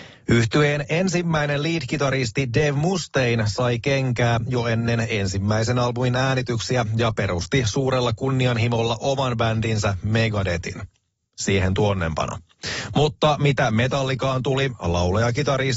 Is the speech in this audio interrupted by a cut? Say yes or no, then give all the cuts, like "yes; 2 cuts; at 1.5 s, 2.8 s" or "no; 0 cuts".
no; 0 cuts